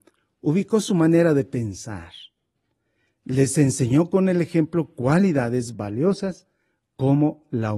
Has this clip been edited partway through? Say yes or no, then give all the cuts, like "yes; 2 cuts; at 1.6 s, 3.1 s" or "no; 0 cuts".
no; 0 cuts